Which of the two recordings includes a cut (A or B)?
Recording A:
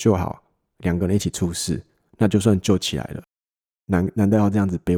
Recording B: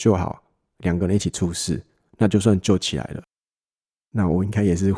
A